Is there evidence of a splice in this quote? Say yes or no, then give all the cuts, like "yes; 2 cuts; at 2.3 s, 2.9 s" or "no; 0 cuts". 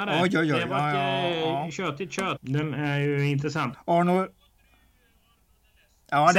yes; 2 cuts; at 2.4 s, 3.7 s